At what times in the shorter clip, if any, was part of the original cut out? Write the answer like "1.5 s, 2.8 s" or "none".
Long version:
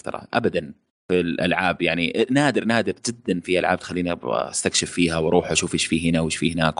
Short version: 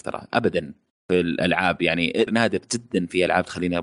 2.3 s